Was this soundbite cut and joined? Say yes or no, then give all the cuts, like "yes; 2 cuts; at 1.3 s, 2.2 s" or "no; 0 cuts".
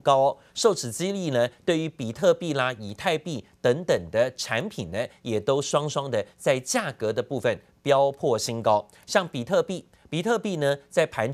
no; 0 cuts